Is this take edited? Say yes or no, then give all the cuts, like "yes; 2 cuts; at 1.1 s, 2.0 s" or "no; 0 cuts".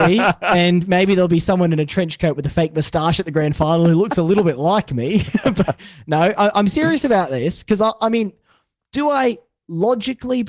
no; 0 cuts